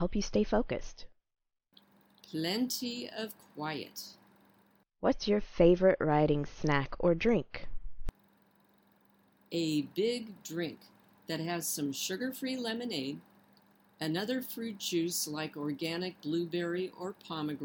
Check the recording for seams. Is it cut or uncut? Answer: uncut